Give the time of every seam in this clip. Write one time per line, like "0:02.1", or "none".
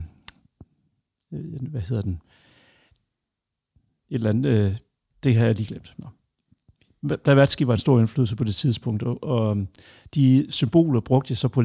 none